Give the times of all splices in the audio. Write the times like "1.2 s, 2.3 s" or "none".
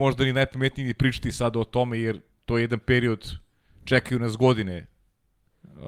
none